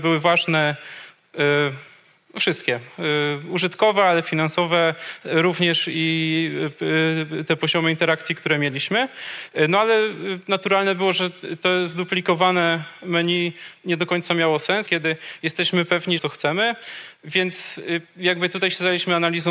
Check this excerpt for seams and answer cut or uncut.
cut